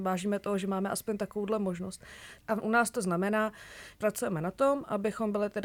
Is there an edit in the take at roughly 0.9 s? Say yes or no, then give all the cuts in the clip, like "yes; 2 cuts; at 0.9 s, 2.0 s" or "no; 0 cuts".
no; 2 cuts; at 2.4 s, 4.0 s